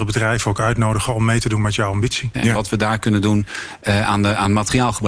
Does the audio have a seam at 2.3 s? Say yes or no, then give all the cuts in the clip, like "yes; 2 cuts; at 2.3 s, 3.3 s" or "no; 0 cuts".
yes; 1 cut; at 2.3 s